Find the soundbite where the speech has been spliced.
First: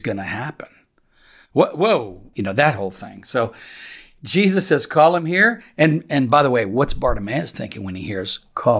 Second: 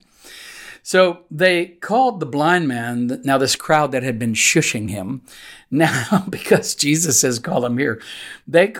first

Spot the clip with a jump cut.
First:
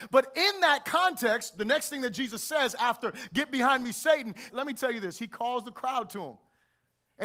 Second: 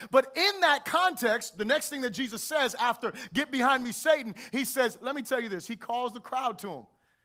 first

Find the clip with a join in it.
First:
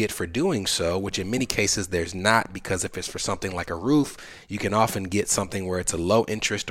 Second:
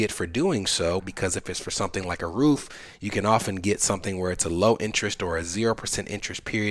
second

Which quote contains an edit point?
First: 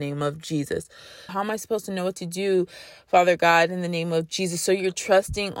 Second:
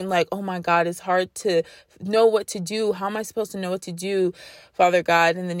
first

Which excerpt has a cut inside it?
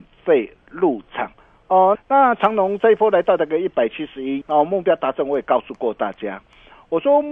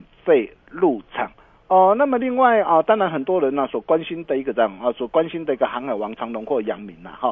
first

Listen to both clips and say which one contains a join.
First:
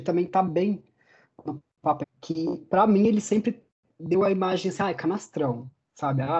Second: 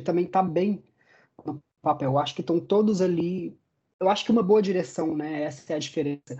first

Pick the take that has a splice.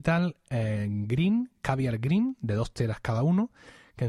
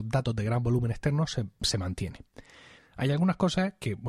second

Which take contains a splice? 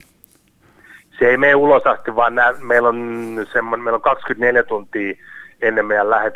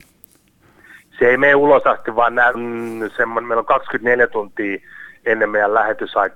second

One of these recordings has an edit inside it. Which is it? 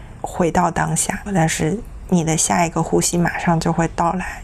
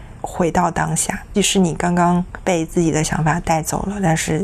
first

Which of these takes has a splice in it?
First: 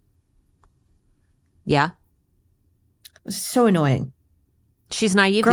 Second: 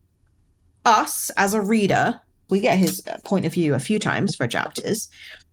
second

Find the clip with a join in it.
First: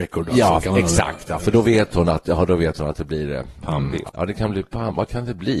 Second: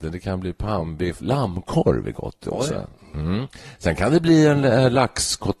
first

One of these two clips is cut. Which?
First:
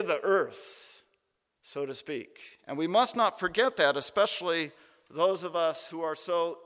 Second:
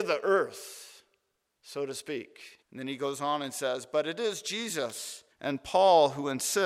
second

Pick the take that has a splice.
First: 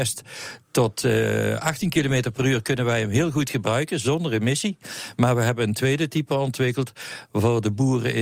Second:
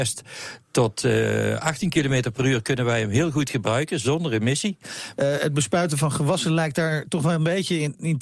second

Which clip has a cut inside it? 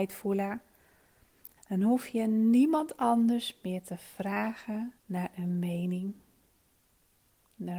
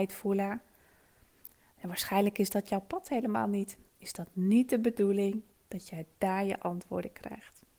first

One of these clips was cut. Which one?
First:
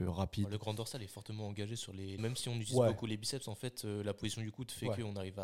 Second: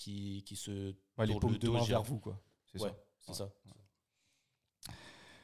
first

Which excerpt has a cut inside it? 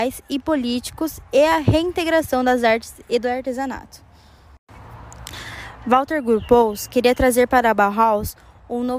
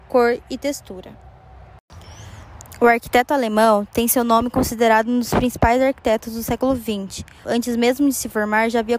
second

